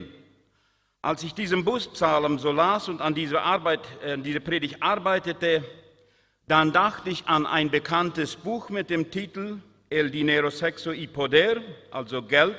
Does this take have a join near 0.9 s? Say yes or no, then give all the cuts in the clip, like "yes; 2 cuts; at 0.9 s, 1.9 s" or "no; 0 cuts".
yes; 1 cut; at 0.9 s